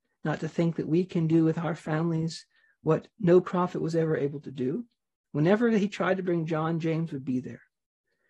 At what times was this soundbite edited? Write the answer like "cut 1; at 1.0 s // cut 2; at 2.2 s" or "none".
cut 1; at 5.2 s